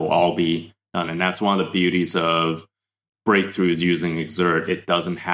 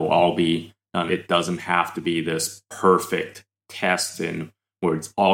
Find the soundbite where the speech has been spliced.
second; 1 cut; at 1.1 s

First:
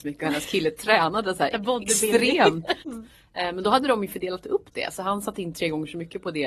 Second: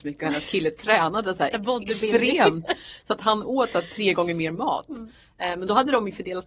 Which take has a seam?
first; 1 cut; at 2.8 s

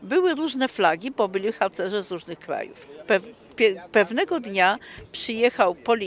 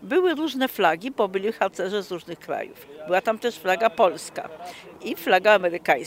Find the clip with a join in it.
first; 1 cut; at 3.0 s

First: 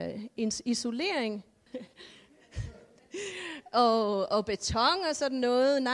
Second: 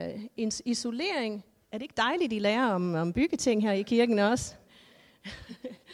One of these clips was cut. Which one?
first; 1 cut; at 1.7 s

